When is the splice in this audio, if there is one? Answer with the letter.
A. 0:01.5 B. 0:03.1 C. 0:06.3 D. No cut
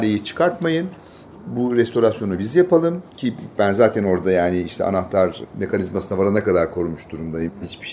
B